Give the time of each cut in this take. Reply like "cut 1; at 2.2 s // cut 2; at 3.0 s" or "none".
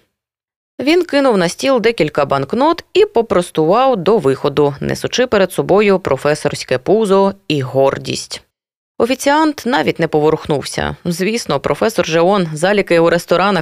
none